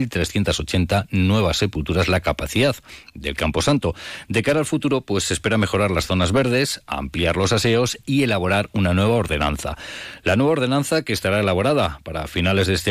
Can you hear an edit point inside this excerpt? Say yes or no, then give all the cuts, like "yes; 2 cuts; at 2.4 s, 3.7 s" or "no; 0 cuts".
no; 0 cuts